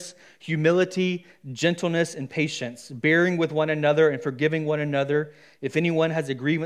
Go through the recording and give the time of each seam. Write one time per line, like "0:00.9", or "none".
none

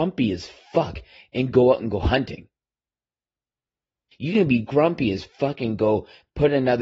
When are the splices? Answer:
0:04.1

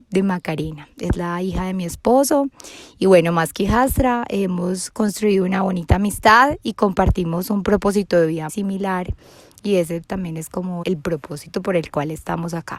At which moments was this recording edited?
0:08.5
0:10.8

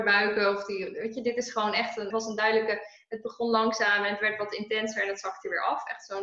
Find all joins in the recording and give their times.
0:02.1

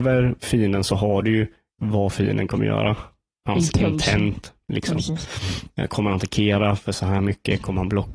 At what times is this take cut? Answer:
none

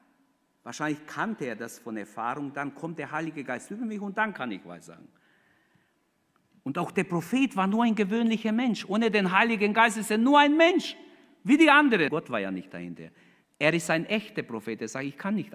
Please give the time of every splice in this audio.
0:12.1
0:13.4

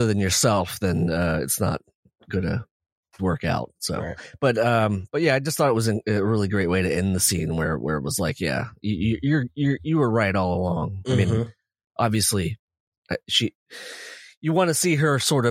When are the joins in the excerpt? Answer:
0:03.2

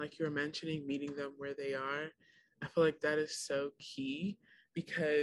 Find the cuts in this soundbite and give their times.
none

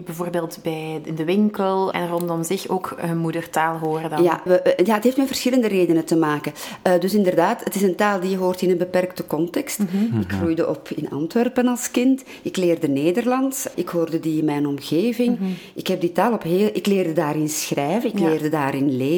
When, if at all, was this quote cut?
0:01.9
0:04.5
0:13.7

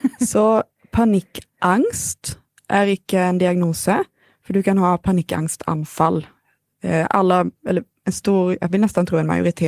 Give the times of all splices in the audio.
none

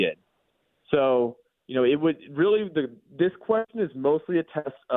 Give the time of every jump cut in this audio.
none

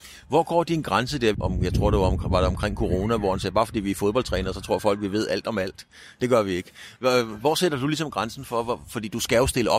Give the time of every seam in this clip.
0:01.3

